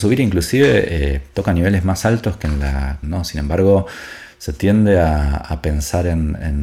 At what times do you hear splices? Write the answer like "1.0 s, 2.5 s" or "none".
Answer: 3.0 s